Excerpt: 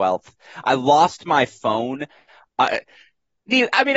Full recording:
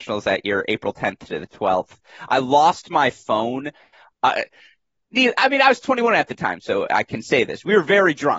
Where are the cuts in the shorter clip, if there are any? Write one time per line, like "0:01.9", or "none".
none